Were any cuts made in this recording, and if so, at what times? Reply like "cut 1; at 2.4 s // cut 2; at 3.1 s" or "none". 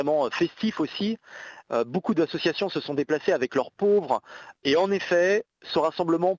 cut 1; at 1.6 s // cut 2; at 4.6 s

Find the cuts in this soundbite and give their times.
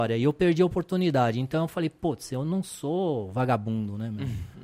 none

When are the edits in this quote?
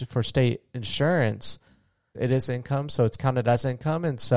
cut 1; at 2.1 s

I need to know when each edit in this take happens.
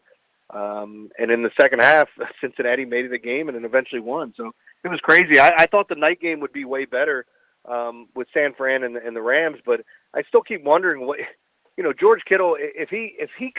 none

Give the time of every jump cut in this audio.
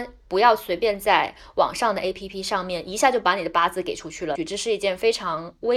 cut 1; at 4.3 s

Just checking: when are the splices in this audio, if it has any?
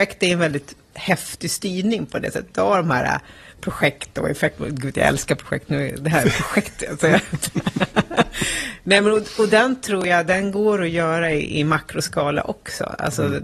none

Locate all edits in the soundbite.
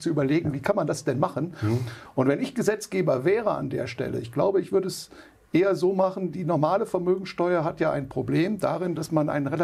none

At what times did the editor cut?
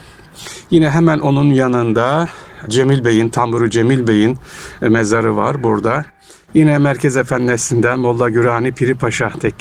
none

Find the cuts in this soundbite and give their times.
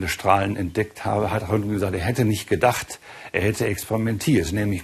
none

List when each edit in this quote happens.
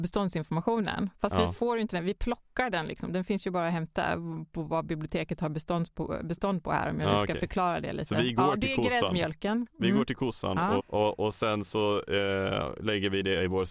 cut 1; at 10.8 s

